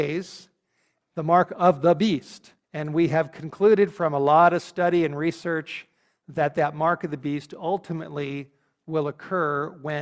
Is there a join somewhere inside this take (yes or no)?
yes